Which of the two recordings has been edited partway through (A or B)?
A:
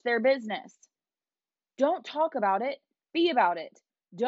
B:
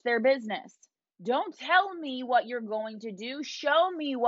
B